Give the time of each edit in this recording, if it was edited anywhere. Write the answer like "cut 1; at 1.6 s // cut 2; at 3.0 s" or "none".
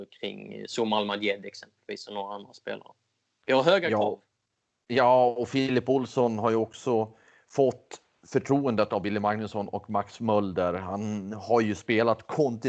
none